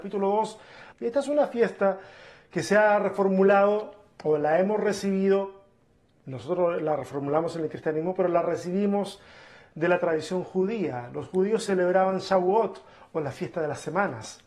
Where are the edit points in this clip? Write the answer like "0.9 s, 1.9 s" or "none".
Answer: 0.9 s